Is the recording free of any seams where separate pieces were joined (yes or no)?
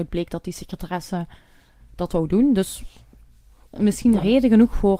yes